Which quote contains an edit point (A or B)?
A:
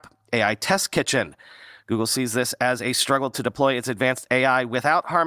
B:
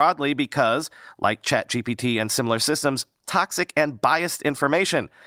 B